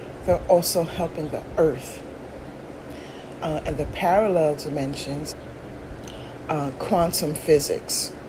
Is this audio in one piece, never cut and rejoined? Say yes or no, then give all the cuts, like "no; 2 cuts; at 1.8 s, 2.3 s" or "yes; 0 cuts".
no; 2 cuts; at 3.4 s, 5.3 s